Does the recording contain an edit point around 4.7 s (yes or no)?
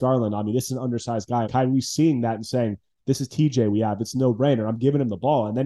no